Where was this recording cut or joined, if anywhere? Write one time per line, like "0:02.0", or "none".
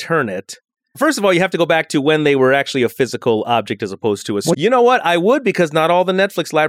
0:04.5